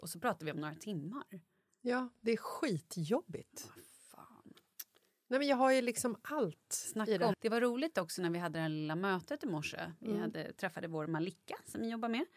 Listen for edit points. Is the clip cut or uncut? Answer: cut